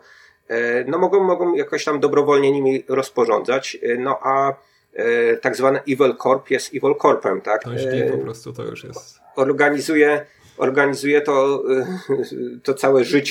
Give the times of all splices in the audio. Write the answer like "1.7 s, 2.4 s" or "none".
7.6 s

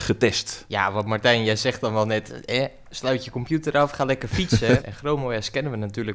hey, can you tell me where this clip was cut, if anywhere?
4.8 s

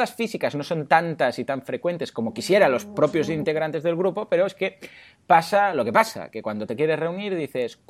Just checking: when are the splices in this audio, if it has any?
none

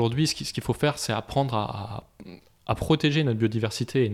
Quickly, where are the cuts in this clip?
none

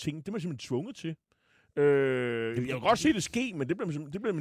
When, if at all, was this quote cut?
none

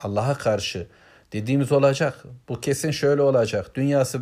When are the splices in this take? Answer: none

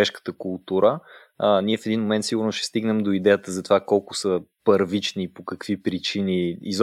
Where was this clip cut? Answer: none

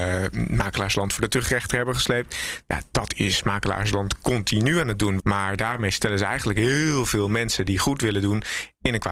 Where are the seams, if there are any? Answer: 5.2 s

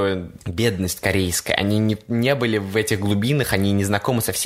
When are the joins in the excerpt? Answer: none

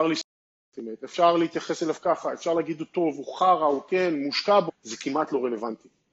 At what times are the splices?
4.7 s

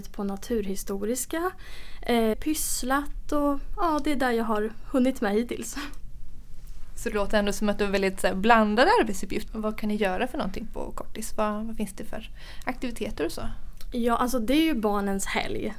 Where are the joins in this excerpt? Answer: 2.3 s, 9.5 s

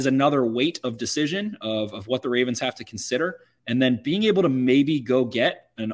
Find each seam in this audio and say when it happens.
none

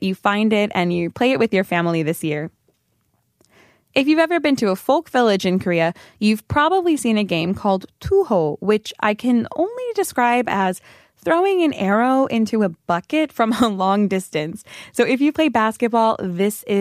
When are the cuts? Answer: none

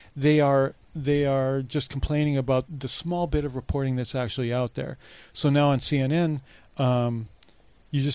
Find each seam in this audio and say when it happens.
2.7 s

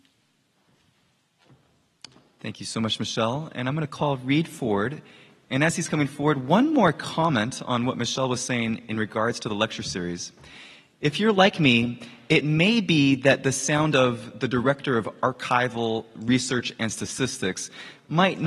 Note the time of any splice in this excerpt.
none

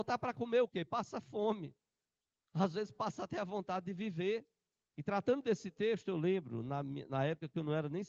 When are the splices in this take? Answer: 4.9 s

